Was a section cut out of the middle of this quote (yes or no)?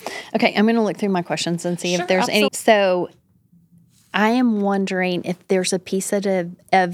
yes